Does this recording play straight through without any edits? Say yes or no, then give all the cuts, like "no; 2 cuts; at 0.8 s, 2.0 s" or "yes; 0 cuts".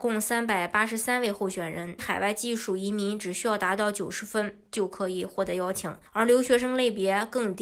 no; 2 cuts; at 2.0 s, 6.1 s